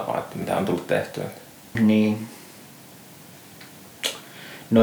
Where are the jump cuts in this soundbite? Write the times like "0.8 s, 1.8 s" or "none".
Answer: 1.7 s